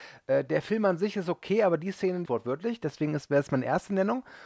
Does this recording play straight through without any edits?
no; 1 cut; at 2.3 s

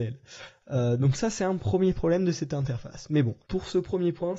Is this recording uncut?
no; 1 cut; at 3.4 s

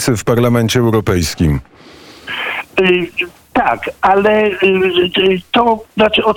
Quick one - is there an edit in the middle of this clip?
no; 0 cuts

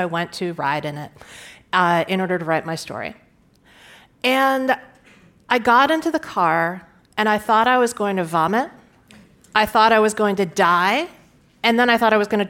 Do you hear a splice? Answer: no; 0 cuts

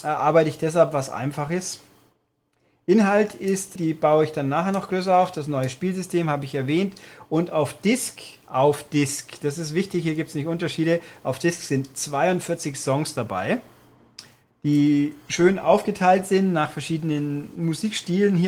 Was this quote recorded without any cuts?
no; 1 cut; at 3.8 s

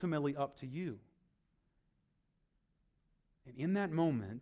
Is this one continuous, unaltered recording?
yes; 0 cuts

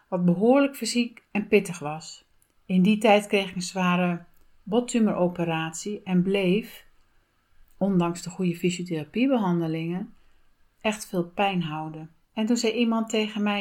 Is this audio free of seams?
no; 1 cut; at 12.2 s

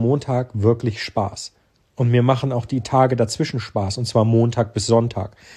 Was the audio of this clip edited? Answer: no; 0 cuts

